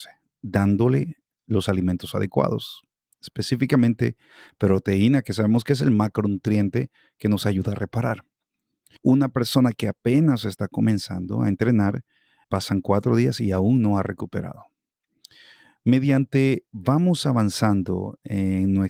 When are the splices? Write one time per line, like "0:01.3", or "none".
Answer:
0:09.0
0:12.4